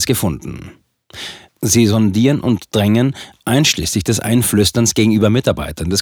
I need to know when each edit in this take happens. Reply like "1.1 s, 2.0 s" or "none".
1.5 s, 3.4 s